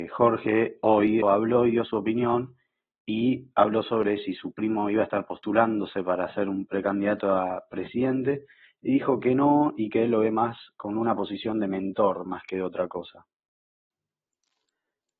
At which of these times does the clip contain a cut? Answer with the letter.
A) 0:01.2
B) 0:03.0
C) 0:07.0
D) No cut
A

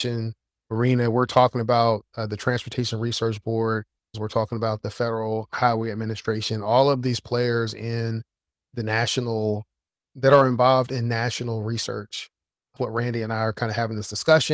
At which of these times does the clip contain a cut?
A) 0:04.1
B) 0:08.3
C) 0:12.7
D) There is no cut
A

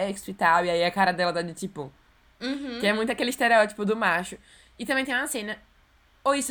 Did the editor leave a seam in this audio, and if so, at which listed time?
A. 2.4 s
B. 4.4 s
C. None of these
A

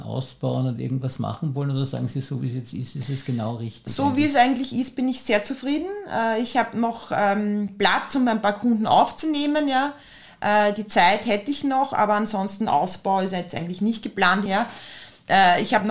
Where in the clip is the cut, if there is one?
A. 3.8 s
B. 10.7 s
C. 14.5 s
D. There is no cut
C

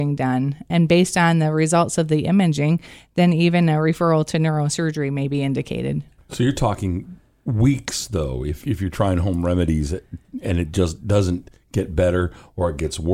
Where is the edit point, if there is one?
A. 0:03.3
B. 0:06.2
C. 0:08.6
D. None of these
C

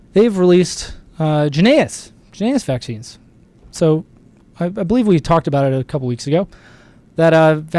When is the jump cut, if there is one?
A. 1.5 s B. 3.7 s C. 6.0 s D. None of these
B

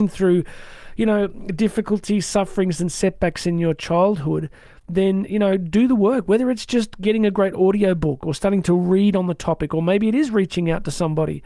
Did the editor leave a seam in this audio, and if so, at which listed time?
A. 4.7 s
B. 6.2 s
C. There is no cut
C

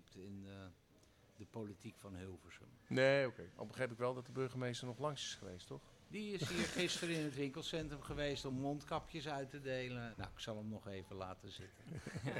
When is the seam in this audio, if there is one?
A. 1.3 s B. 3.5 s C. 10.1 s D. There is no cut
C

